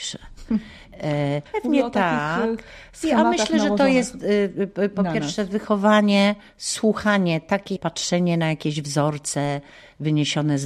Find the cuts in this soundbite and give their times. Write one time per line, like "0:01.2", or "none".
0:01.5
0:07.8